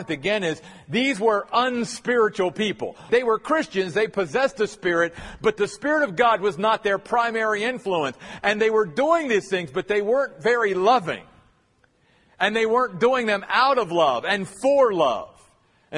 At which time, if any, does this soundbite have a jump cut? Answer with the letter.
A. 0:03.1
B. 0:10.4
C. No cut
A